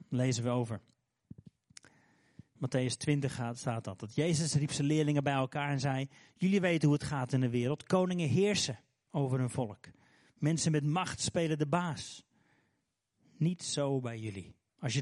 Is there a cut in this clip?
no; 0 cuts

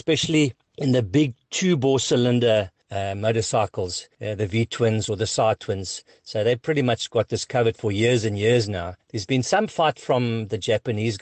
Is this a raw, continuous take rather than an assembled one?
yes; 0 cuts

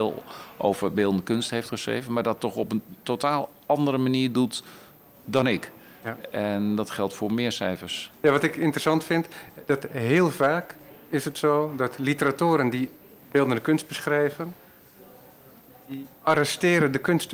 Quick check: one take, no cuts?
yes; 0 cuts

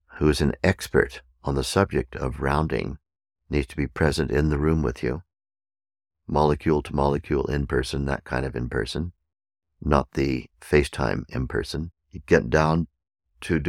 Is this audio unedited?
no; 1 cut; at 11.9 s

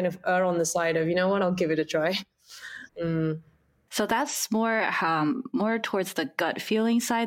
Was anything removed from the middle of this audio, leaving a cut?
yes; 1 cut; at 2.9 s

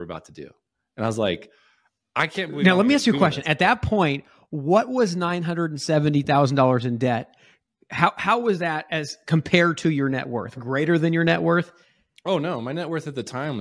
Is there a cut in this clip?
yes; 1 cut; at 10.5 s

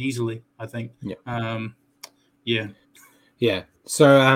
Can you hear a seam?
no; 0 cuts

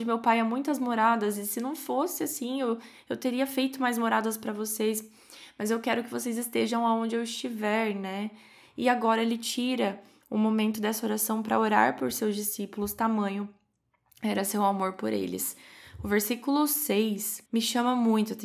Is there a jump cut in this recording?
yes; 1 cut; at 17.5 s

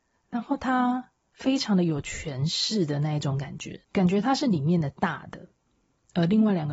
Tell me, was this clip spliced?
yes; 1 cut; at 3.8 s

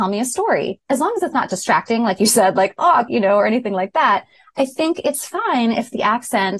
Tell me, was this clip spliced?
yes; 1 cut; at 3.1 s

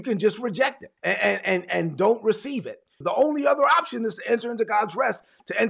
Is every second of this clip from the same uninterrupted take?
no; 2 cuts; at 1.0 s, 3.0 s

